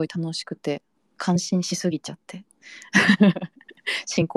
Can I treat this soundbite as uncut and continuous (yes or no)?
no